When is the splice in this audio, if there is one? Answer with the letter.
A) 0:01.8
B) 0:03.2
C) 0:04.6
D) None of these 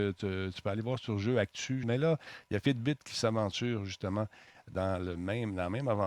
A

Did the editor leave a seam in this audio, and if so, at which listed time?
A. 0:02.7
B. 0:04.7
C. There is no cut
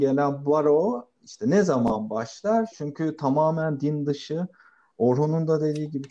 A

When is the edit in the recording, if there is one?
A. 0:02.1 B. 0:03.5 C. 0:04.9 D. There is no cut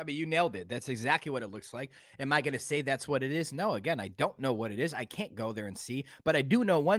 D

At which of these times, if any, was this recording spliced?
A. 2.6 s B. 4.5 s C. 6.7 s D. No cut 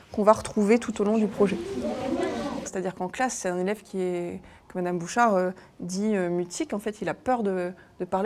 A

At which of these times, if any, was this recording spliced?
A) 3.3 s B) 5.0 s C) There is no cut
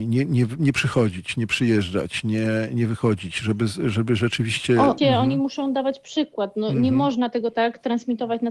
B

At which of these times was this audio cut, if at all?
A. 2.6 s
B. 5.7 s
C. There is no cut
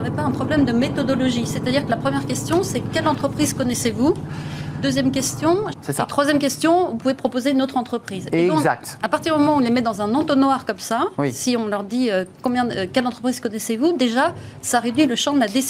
B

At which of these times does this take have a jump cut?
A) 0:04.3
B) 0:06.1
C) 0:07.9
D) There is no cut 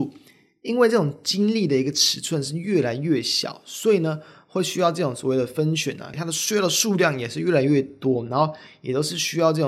B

